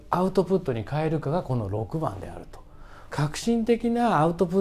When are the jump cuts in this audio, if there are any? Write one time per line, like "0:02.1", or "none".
0:03.1